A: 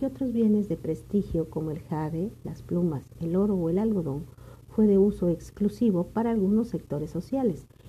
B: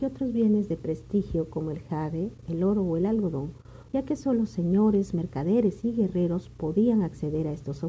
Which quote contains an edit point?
B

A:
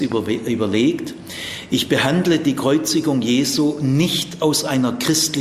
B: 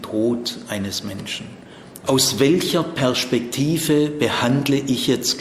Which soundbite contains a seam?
B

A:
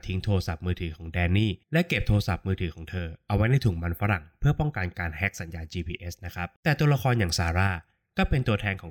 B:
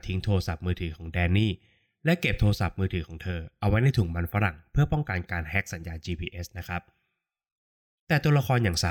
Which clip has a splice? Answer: A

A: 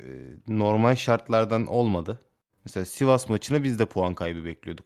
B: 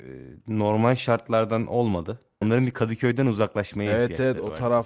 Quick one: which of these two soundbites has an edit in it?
B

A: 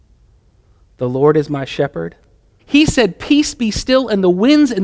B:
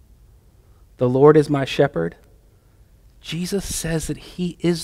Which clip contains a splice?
A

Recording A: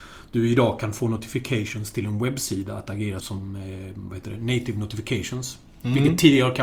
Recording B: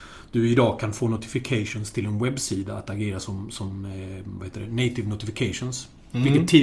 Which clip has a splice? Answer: A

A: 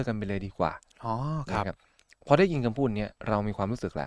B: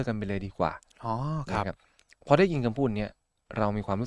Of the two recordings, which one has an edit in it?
A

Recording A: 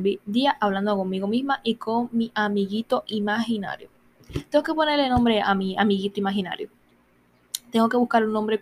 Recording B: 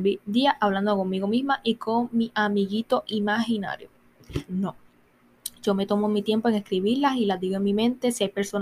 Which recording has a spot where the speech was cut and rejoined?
B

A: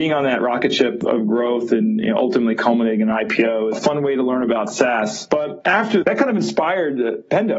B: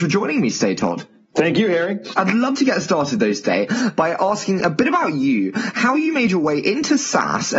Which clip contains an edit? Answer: A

